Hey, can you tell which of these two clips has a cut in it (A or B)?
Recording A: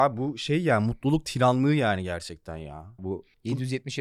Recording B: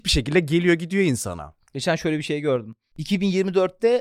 A